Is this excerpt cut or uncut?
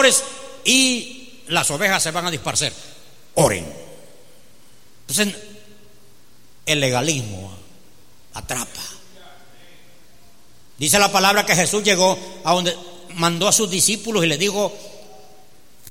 cut